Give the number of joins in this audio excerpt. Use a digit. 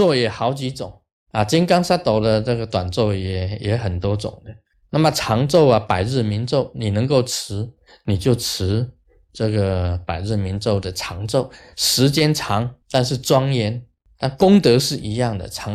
1